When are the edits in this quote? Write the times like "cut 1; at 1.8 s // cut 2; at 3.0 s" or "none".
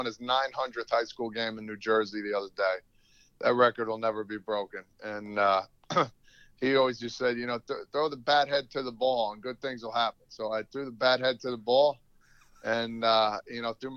none